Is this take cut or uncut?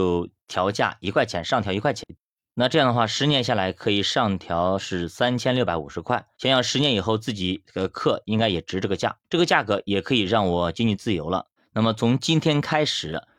cut